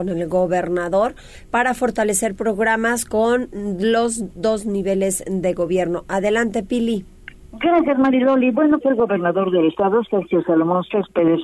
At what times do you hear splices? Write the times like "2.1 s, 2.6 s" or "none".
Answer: 8.8 s